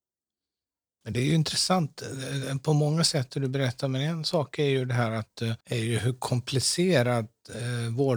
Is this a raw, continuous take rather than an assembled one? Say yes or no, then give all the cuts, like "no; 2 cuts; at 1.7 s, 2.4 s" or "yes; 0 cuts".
no; 2 cuts; at 1.0 s, 5.6 s